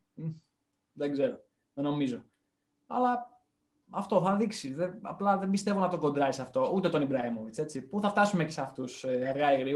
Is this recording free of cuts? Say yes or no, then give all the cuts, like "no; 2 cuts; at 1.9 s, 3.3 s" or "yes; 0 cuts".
yes; 0 cuts